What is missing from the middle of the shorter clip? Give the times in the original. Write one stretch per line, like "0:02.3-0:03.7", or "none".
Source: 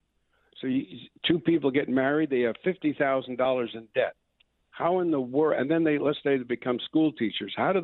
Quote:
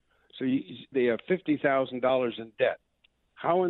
0:01.1-0:02.3